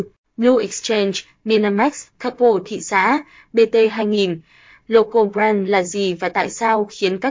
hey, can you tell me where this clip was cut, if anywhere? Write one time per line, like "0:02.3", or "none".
0:02.1